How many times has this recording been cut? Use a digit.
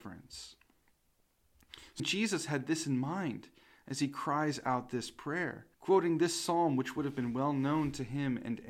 2